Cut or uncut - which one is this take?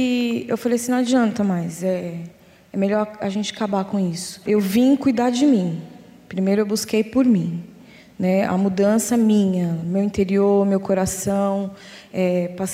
uncut